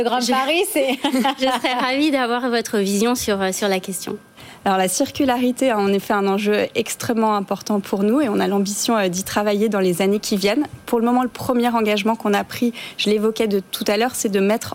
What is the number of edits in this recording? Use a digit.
0